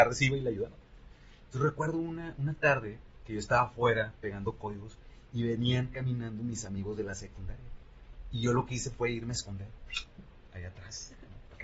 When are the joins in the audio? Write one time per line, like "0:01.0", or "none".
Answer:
none